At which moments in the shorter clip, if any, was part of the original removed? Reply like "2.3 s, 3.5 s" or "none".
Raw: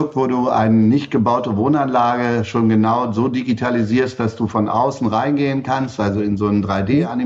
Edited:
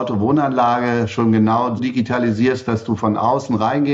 1.8 s